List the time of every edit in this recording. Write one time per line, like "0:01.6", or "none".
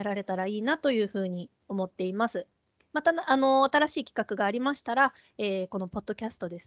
none

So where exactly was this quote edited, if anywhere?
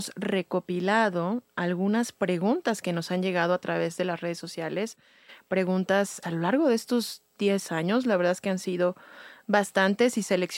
0:06.2

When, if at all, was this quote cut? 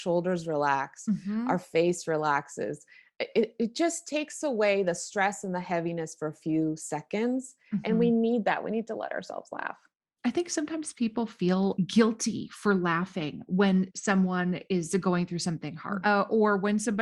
0:16.0

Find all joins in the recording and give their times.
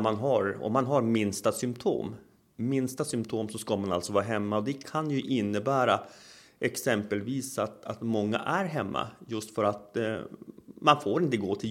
none

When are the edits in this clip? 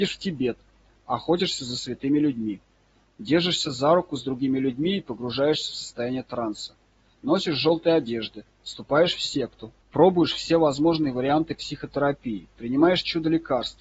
0:07.1
0:09.8

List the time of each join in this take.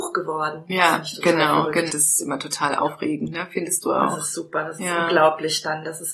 0:01.9

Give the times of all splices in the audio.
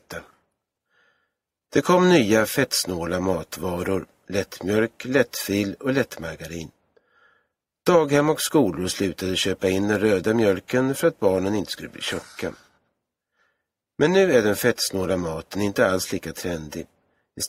none

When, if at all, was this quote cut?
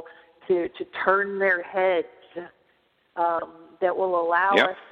none

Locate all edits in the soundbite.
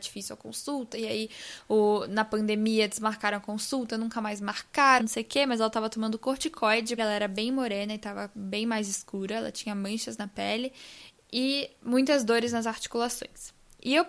0:05.0
0:07.0

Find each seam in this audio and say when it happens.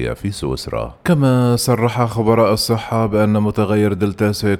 0:01.0

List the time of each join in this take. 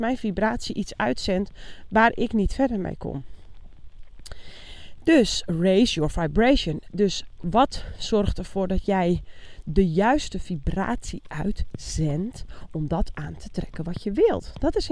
none

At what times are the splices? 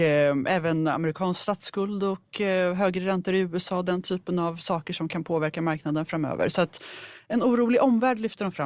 none

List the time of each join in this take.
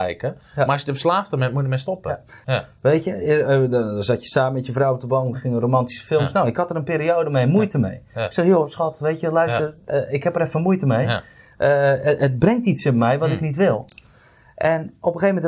0:02.4

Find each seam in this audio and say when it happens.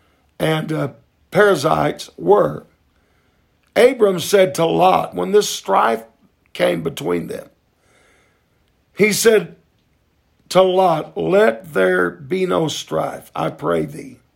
none

